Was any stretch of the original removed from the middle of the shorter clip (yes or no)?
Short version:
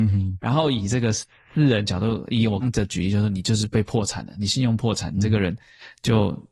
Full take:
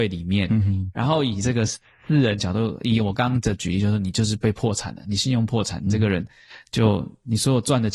yes